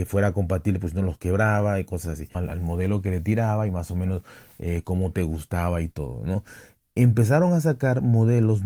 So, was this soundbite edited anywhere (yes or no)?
yes